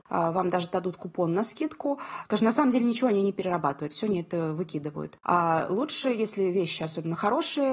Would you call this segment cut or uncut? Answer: cut